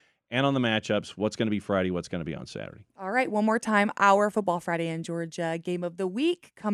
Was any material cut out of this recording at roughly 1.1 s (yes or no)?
no